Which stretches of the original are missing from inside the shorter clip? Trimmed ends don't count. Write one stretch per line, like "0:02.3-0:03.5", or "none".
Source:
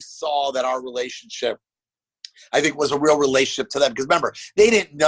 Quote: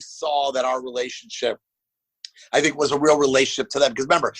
none